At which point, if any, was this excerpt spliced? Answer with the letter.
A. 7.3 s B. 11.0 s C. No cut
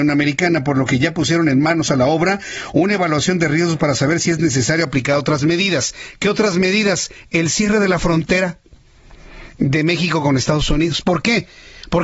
C